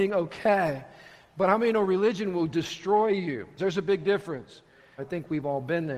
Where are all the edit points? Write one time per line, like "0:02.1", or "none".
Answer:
0:03.6
0:05.0